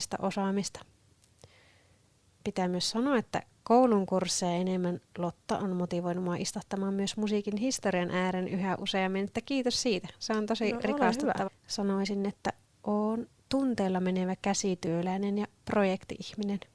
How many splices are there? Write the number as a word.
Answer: one